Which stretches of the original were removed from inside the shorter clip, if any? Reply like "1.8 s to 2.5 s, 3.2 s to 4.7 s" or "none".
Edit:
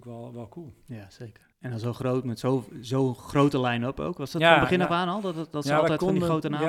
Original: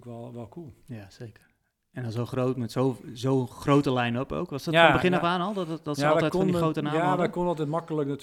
1.5 s to 1.8 s

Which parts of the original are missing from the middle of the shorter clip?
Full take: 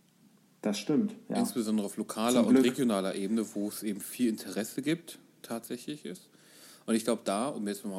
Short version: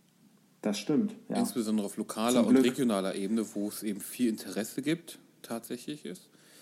none

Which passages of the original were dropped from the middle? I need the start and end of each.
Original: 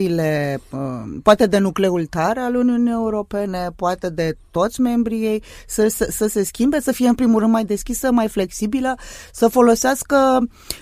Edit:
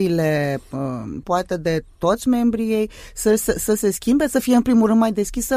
1.2 s to 3.8 s

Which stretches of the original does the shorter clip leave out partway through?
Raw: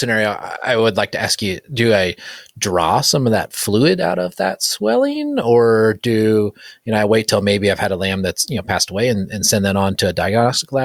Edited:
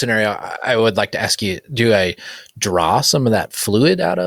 none

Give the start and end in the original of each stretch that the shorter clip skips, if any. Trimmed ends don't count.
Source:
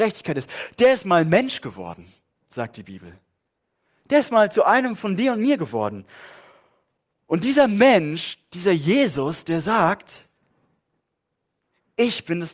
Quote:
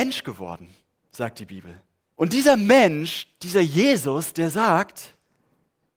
3.5 s to 7.2 s

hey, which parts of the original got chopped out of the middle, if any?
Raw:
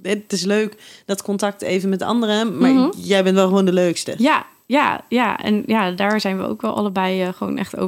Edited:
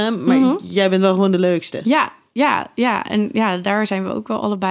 none

